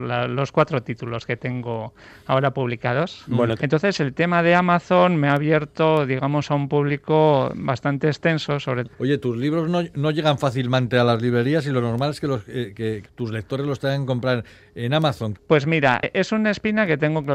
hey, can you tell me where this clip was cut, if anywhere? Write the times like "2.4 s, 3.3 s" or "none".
3.6 s, 8.8 s, 15.3 s